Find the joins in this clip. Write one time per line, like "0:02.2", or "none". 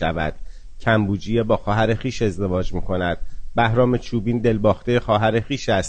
none

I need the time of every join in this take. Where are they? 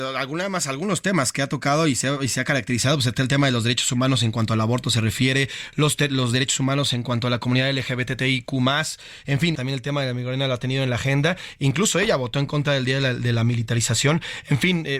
0:09.5

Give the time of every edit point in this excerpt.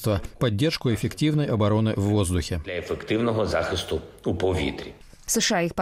none

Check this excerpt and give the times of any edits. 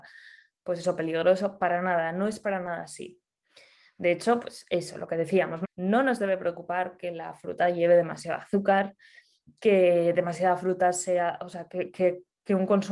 0:05.6

